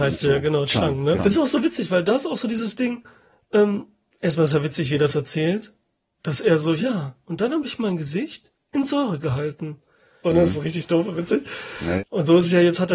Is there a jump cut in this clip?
yes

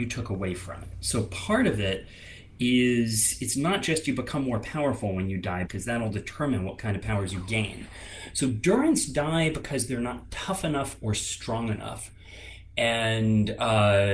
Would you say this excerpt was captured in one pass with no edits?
no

